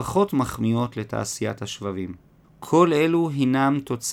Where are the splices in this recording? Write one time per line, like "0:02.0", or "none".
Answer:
0:02.4